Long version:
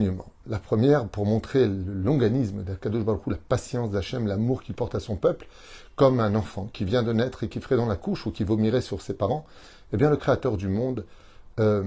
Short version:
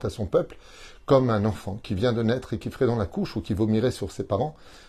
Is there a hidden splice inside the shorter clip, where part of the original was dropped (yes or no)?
no